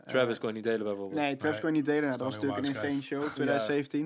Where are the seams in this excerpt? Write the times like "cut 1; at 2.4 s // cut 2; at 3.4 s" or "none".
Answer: none